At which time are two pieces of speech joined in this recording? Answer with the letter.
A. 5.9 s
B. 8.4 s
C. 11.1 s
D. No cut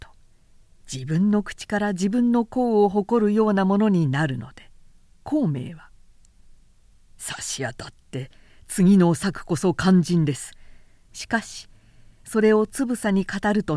C